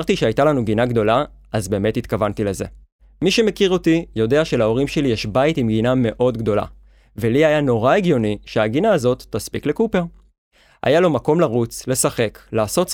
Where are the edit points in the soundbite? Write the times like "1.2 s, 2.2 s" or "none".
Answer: none

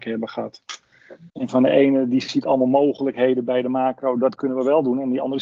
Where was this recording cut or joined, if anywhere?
1.3 s

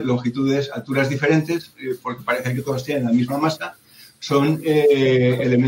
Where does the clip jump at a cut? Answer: none

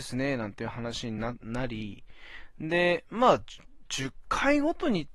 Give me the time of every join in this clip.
none

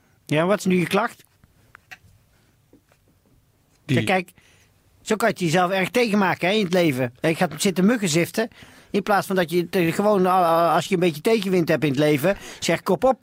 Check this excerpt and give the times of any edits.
7.2 s, 8.8 s

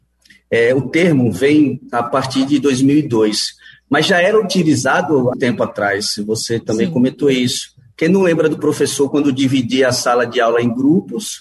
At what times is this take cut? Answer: 5.3 s

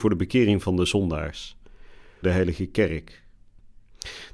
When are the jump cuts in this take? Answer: 2.2 s

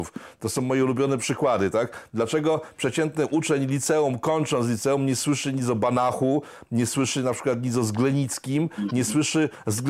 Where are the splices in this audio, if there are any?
none

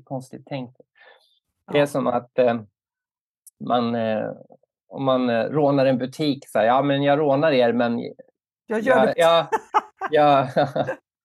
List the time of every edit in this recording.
9.1 s

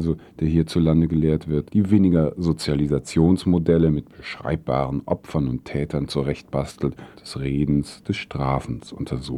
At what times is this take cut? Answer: 1.7 s, 7.1 s

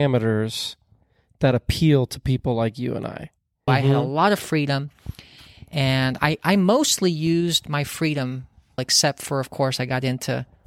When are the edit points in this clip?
3.7 s, 8.8 s

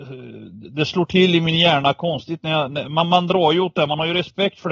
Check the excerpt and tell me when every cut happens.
none

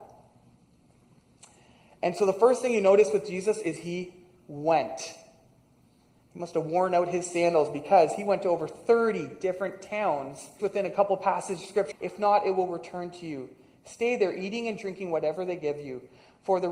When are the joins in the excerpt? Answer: 10.6 s, 11.9 s

